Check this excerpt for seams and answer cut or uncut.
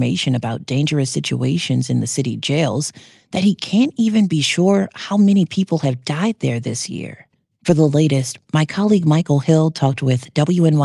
uncut